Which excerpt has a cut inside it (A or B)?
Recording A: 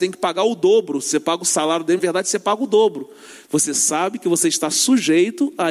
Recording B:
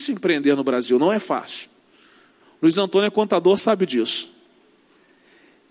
A